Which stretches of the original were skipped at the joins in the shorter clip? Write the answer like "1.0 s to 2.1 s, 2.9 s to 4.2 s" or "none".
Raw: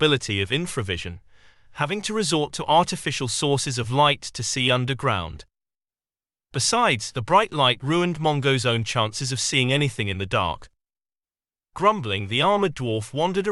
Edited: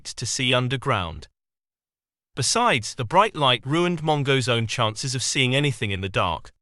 none